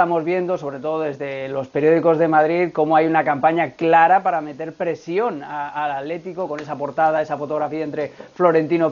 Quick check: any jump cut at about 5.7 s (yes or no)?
no